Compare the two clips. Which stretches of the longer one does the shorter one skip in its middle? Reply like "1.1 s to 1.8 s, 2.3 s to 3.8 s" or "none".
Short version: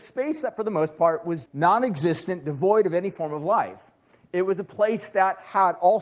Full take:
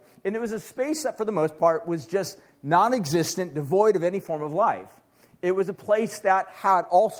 2.1 s to 2.5 s

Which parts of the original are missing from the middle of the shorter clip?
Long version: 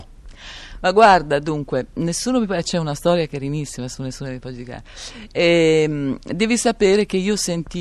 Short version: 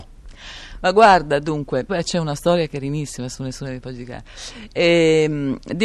1.9 s to 2.5 s

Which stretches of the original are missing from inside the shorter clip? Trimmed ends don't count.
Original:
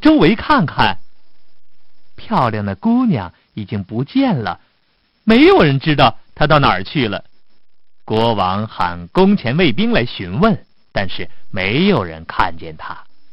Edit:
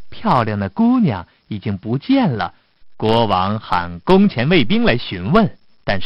4.9 s to 7.9 s

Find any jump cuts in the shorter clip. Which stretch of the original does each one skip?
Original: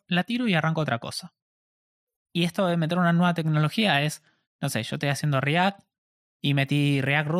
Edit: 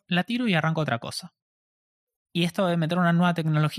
none

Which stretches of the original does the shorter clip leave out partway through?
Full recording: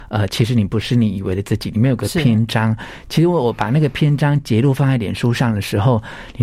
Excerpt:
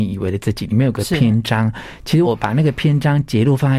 3.3 s to 3.4 s

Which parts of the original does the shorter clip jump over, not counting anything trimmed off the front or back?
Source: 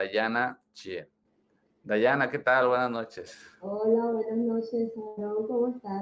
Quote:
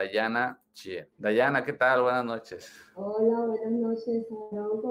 1.1 s to 1.8 s

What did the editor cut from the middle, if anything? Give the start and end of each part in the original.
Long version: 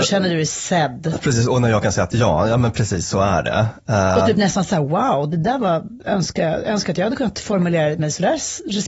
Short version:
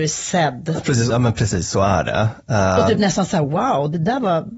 1.5 s to 2.5 s

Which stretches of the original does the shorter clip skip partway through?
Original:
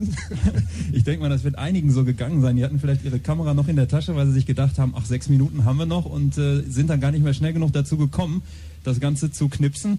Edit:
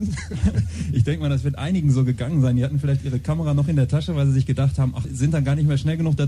5.0 s to 6.6 s

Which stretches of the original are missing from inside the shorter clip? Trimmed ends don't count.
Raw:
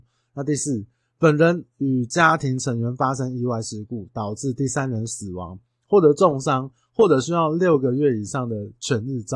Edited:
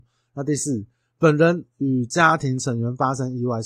none

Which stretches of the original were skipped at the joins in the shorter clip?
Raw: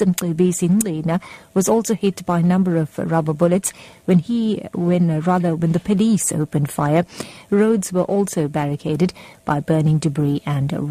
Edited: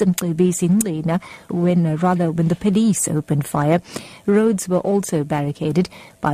1.5 s to 4.7 s

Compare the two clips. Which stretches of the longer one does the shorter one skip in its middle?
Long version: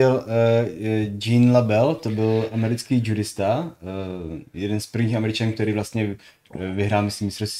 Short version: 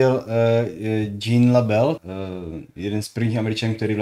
2.0 s to 3.8 s

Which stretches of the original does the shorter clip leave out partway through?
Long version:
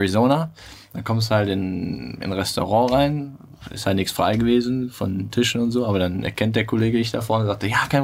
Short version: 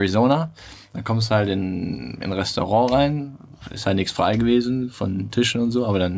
none

